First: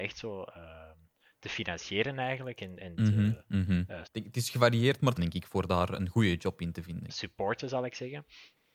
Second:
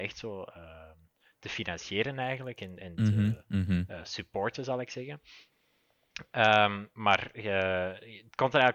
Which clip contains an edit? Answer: first; 3 cuts; at 4.0 s, 5.2 s, 7.1 s

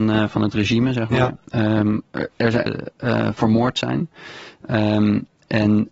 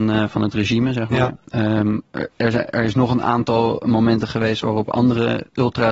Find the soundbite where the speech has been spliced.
first; 1 cut; at 2.7 s

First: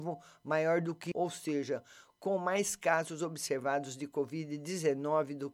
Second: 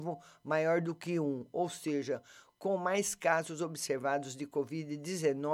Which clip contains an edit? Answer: first; 1 cut; at 1.1 s

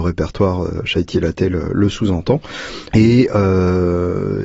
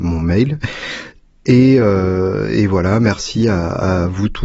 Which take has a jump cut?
first; 1 cut; at 2.9 s

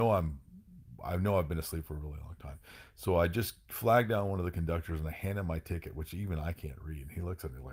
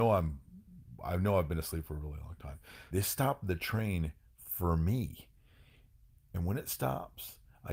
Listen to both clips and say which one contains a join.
second; 1 cut; at 2.9 s

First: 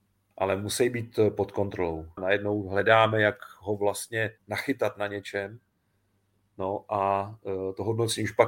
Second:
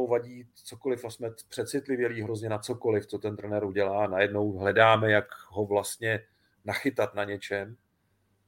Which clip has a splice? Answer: first; 2 cuts; at 2.2 s, 4.4 s

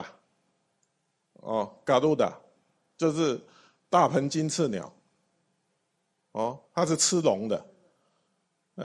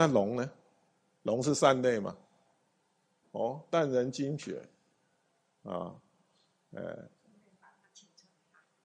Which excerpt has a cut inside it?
second; 1 cut; at 3.2 s

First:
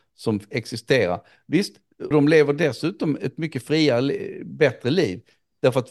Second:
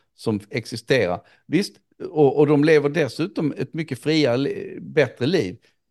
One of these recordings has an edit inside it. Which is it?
first; 1 cut; at 2.1 s

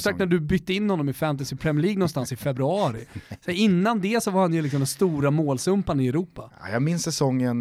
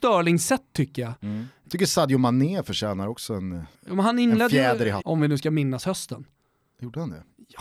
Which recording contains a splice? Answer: second; 2 cuts; at 3.7 s, 5.0 s

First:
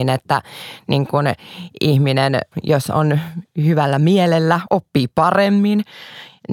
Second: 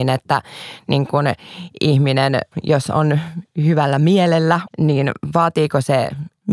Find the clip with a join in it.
second; 1 cut; at 4.7 s

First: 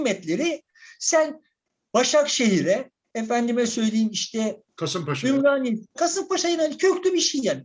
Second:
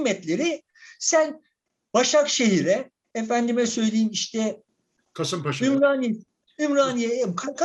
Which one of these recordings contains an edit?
first; 2 cuts; at 4.7 s, 6.0 s

